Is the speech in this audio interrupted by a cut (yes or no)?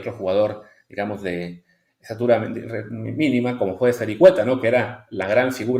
no